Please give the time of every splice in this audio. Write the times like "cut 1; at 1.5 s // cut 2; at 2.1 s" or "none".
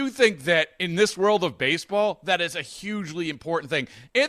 none